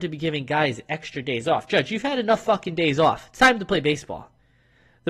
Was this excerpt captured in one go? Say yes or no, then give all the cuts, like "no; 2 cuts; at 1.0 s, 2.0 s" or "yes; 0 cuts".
yes; 0 cuts